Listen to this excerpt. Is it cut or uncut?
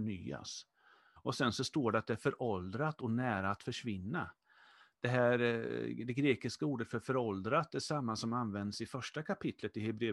cut